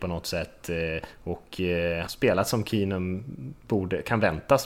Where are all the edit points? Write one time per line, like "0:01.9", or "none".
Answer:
0:02.1